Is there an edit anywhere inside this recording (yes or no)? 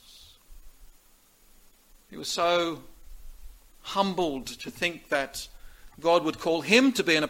no